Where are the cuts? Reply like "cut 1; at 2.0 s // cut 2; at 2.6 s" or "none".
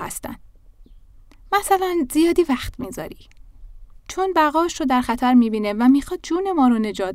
cut 1; at 4.0 s